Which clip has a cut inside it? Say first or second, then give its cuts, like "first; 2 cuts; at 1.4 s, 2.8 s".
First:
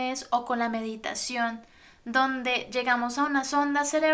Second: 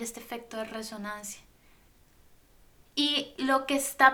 second; 1 cut; at 2.9 s